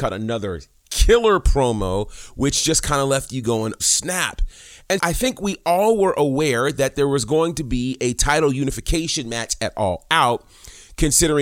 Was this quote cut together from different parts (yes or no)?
yes